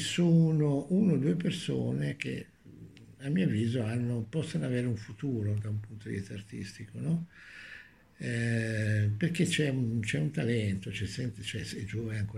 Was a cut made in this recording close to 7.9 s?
no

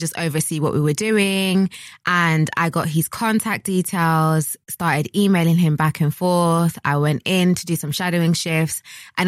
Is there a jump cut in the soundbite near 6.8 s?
no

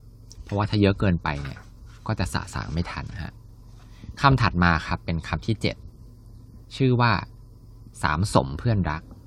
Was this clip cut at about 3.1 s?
yes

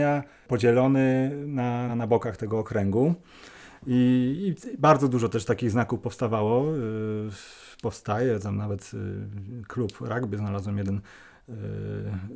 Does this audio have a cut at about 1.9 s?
yes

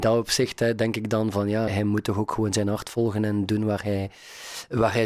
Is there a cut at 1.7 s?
yes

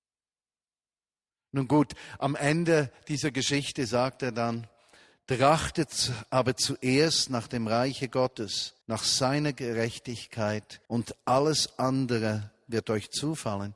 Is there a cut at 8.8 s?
yes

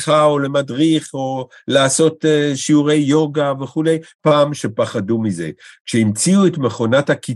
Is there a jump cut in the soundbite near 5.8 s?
no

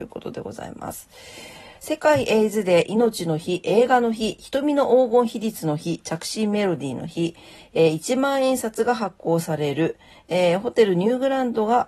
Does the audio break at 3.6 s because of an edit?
no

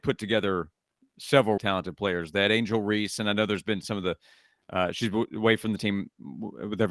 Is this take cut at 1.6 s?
yes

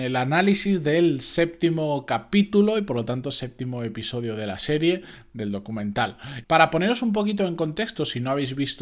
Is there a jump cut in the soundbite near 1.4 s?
no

